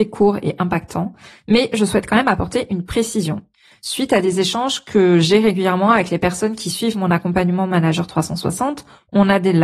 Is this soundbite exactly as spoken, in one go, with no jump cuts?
yes; 0 cuts

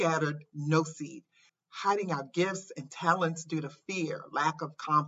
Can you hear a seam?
yes; 1 cut; at 1.5 s

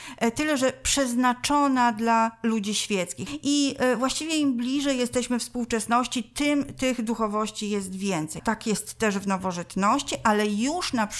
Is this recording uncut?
no; 2 cuts; at 3.3 s, 8.4 s

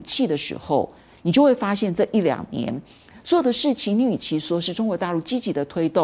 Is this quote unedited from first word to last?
yes; 0 cuts

